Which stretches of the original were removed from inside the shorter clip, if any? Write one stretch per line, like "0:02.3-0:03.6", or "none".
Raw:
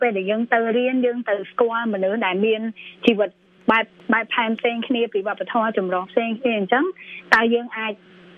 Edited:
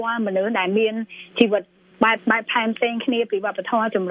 0:03.8-0:04.0